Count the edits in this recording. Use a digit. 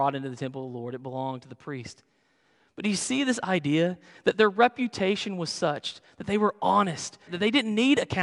1